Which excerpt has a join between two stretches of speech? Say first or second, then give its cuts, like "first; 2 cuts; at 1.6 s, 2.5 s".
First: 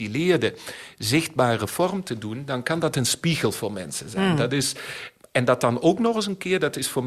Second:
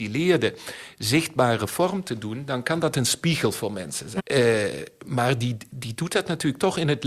second; 1 cut; at 4.2 s